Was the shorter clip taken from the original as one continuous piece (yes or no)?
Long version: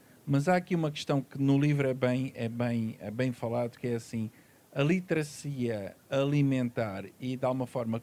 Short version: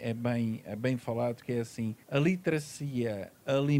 no